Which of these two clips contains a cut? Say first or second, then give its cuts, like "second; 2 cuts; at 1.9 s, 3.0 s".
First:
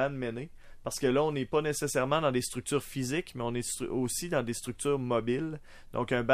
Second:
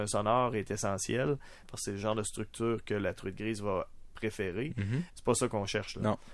second; 2 cuts; at 1.6 s, 5.1 s